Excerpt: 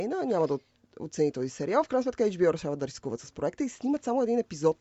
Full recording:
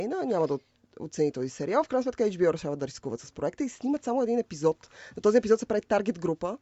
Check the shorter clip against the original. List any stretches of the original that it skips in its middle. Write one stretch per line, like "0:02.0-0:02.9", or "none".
none